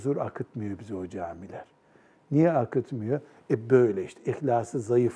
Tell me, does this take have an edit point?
no; 0 cuts

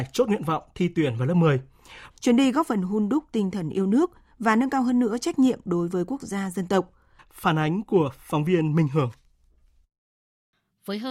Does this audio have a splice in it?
yes; 2 cuts; at 2.1 s, 7.2 s

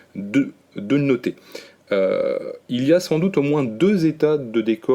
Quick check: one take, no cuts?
yes; 0 cuts

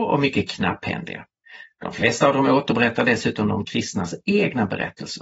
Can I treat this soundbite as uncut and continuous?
yes; 0 cuts

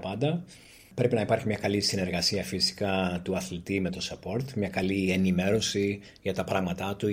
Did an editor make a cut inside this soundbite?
no; 0 cuts

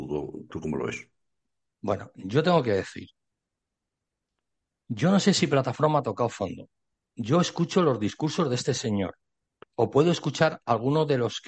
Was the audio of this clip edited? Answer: no; 0 cuts

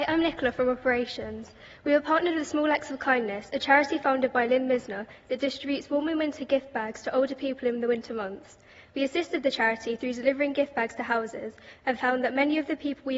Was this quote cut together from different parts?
no; 0 cuts

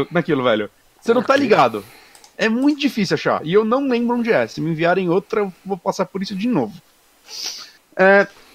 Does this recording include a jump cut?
no; 0 cuts

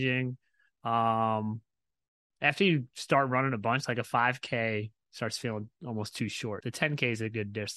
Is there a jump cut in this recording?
yes; 2 cuts; at 2.3 s, 6.6 s

